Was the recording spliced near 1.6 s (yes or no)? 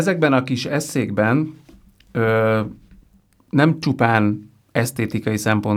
no